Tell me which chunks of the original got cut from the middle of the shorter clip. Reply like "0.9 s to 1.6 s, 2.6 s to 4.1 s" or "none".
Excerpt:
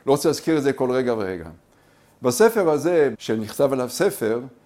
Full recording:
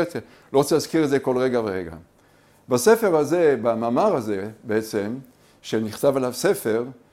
3.6 s to 5.6 s